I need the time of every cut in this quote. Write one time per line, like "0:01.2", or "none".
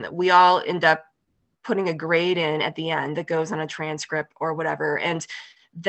none